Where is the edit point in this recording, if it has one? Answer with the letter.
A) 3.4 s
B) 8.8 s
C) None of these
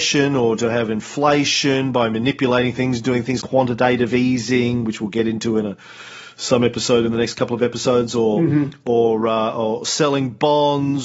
A